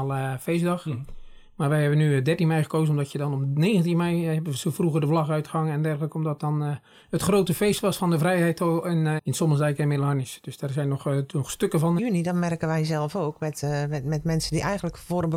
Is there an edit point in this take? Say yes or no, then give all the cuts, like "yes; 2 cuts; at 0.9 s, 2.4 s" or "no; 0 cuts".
yes; 2 cuts; at 9.2 s, 12.0 s